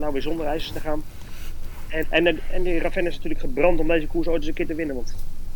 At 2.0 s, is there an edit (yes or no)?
yes